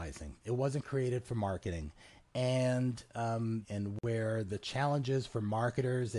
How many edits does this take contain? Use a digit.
1